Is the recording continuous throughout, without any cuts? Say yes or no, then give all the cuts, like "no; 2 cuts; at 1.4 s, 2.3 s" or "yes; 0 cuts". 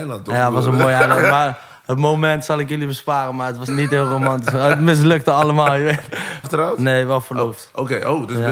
no; 2 cuts; at 3.7 s, 6.4 s